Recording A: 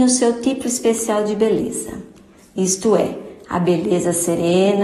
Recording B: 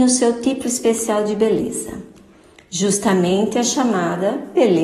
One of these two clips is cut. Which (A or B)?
A